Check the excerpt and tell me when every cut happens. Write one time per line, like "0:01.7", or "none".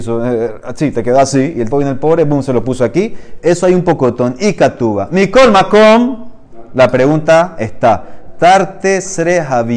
0:01.7